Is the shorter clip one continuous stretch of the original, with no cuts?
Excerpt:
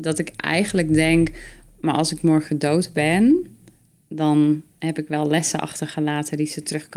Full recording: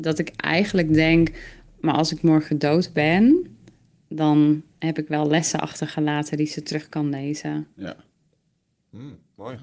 yes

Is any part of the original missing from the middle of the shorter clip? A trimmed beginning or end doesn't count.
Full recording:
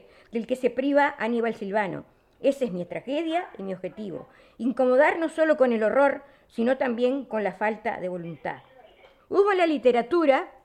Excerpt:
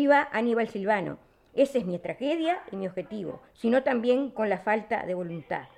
yes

